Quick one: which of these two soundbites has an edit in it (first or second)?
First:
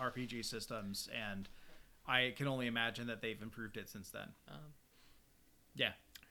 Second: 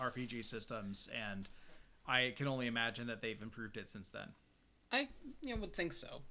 first